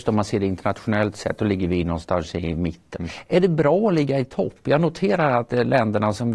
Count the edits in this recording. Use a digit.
1